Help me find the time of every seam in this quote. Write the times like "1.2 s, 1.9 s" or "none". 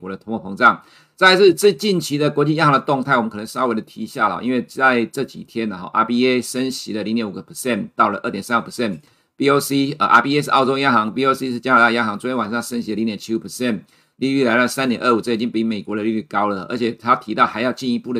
none